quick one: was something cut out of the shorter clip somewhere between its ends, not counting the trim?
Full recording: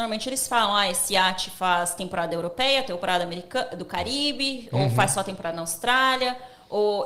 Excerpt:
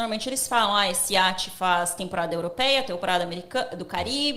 no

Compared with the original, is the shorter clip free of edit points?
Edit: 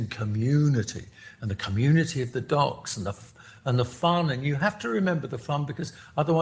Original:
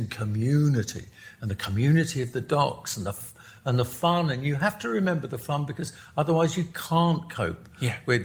yes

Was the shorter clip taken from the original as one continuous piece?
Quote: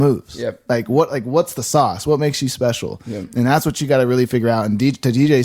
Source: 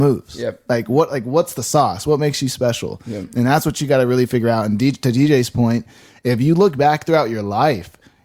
yes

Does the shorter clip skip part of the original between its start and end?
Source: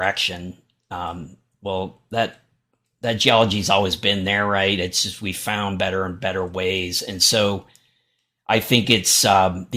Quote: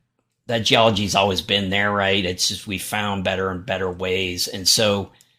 no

